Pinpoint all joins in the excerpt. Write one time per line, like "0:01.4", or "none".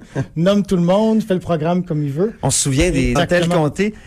0:03.2